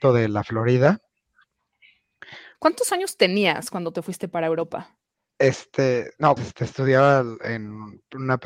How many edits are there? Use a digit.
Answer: 3